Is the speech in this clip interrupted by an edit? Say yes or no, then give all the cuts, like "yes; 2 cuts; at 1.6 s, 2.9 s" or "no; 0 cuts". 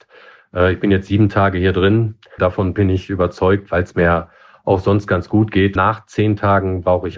yes; 2 cuts; at 2.4 s, 5.8 s